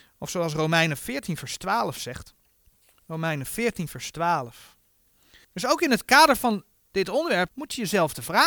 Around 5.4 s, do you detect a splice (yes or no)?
yes